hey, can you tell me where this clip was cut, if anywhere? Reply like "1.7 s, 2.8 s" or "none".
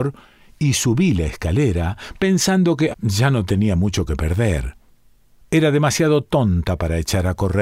2.9 s